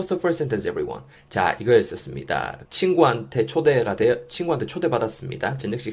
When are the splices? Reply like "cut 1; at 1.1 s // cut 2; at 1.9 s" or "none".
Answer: cut 1; at 2.7 s